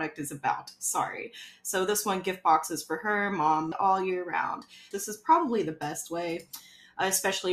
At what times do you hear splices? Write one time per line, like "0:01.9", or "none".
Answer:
0:03.7
0:04.9